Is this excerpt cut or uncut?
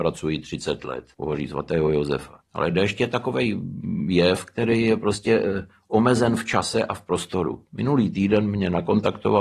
cut